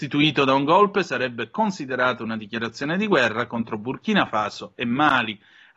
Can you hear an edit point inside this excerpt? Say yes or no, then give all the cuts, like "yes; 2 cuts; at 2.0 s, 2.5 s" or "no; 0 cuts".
no; 0 cuts